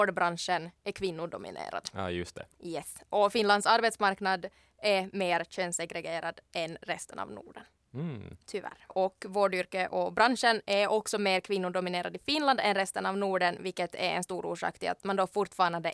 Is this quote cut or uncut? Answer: cut